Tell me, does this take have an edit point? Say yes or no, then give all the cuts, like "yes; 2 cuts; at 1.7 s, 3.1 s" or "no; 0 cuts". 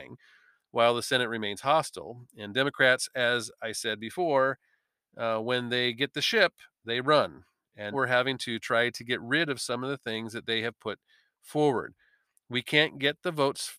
yes; 1 cut; at 7.9 s